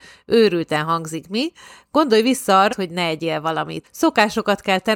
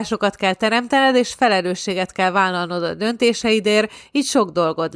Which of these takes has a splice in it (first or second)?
first